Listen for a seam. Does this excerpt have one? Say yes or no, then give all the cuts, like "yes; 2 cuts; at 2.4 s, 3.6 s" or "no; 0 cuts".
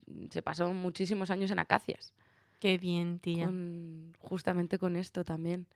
no; 0 cuts